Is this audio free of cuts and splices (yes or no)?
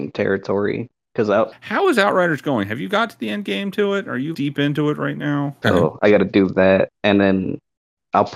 no